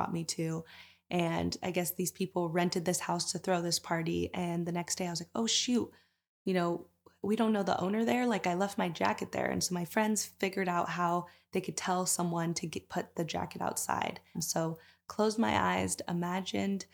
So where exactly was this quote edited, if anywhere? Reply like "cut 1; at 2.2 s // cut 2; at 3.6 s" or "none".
cut 1; at 14.3 s